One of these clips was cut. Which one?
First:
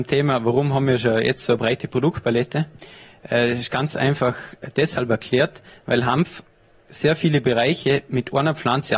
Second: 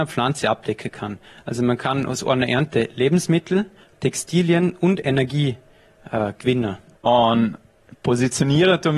second; 2 cuts; at 3.9 s, 6.9 s

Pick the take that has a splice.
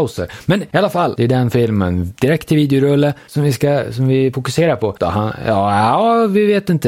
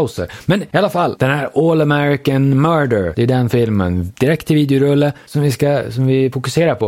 first; 2 cuts; at 1.2 s, 5.0 s

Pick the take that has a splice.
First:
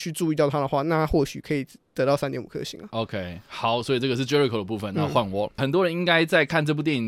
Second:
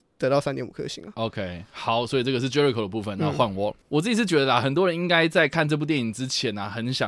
first; 1 cut; at 5.6 s

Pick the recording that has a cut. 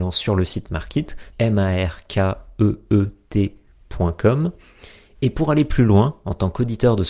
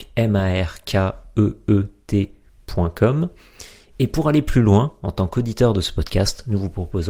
first; 1 cut; at 1.3 s

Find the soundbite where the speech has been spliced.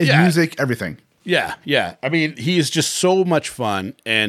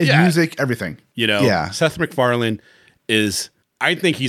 second; 1 cut; at 1.1 s

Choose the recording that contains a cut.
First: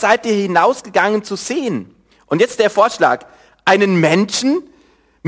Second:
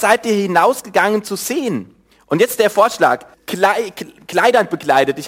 second; 1 cut; at 3.3 s

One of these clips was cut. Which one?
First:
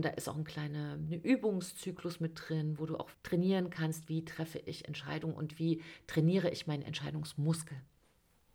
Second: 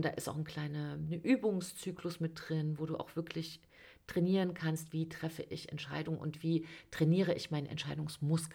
first; 1 cut; at 3.1 s

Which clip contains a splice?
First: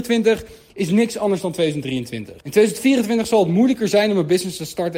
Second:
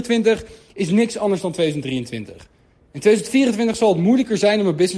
first; 1 cut; at 2.4 s

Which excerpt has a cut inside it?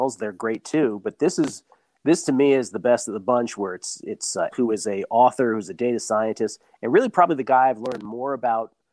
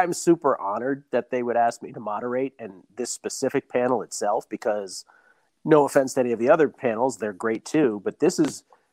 first; 1 cut; at 4.5 s

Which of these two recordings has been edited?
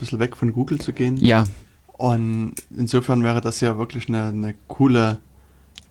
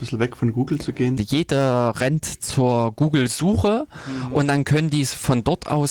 second; 1 cut; at 1.2 s

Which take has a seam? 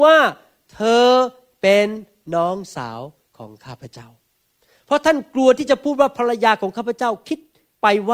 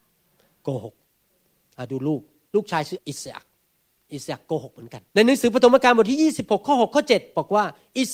second; 2 cuts; at 3.0 s, 5.1 s

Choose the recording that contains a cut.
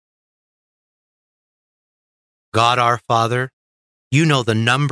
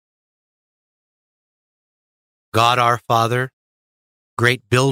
first; 1 cut; at 3.9 s

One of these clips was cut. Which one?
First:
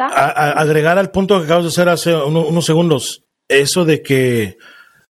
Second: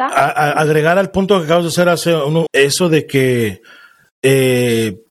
second; 1 cut; at 2.5 s

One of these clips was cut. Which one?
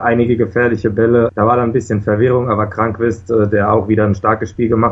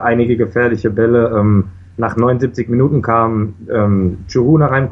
first; 1 cut; at 1.3 s

